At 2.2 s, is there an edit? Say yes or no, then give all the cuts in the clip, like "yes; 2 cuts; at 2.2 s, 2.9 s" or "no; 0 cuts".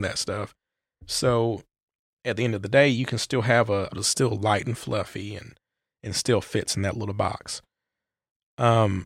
no; 1 cut; at 3.9 s